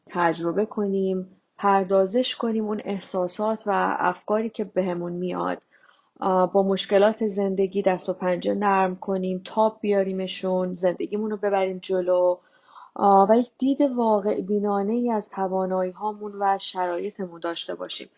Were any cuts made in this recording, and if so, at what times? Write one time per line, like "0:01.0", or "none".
none